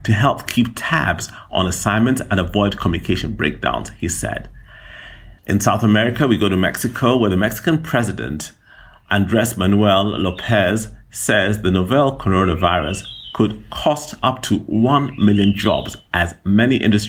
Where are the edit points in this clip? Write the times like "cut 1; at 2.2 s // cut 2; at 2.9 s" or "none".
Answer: cut 1; at 5.4 s